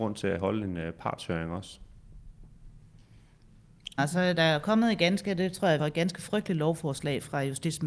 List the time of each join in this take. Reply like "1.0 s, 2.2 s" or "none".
4.0 s, 5.8 s